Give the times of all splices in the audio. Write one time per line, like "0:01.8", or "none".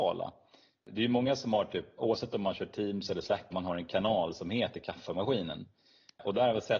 0:02.0
0:03.5